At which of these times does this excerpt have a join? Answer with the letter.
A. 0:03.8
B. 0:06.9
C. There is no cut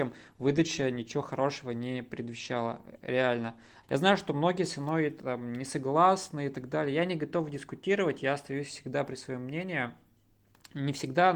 A